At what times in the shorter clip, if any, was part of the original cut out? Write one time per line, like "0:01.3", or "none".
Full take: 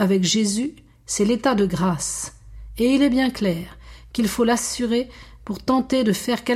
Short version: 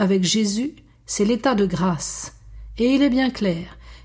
none